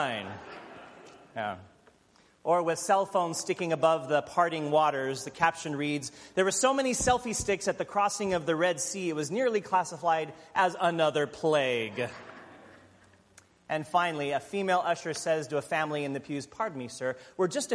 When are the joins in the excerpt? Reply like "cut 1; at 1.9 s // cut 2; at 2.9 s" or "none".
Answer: none